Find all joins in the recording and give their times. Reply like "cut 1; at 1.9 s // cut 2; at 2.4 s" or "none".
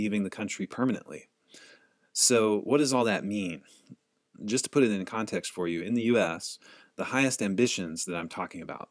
none